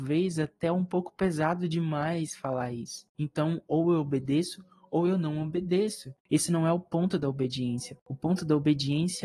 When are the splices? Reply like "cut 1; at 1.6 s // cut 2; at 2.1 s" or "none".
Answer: cut 1; at 3.1 s // cut 2; at 6.2 s